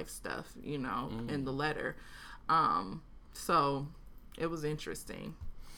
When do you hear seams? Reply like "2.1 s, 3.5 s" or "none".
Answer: none